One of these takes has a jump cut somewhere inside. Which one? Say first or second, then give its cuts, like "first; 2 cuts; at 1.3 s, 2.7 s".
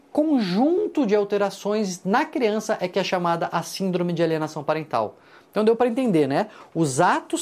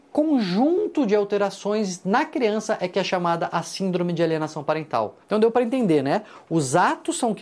second; 1 cut; at 5.2 s